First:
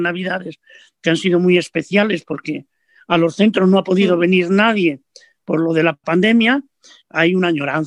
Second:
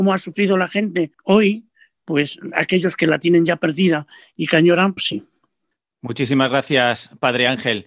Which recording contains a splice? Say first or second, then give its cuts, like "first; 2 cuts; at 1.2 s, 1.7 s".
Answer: second; 2 cuts; at 1.1 s, 5.0 s